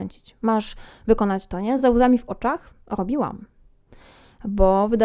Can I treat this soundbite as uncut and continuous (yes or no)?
yes